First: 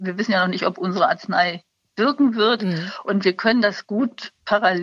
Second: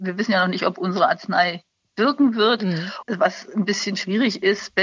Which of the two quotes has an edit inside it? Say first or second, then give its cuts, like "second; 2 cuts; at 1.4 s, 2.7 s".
second; 1 cut; at 3.0 s